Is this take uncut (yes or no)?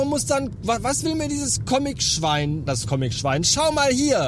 no